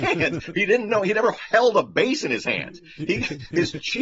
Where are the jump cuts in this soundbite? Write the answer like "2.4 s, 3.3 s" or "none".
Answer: none